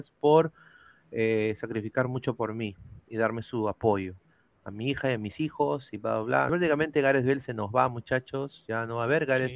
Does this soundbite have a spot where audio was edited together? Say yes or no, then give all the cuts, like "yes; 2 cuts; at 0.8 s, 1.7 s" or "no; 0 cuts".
yes; 1 cut; at 6.5 s